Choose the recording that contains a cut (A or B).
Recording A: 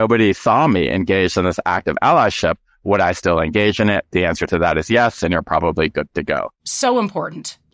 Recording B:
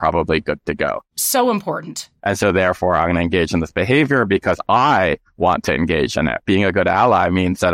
B